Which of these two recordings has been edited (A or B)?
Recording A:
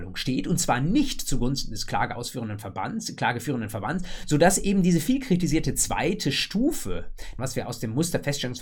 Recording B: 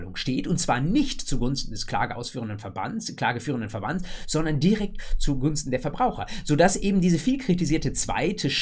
A